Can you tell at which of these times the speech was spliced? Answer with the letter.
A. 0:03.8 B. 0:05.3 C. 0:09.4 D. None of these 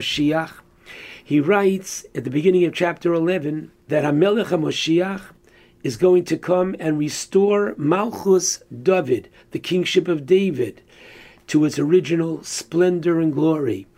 A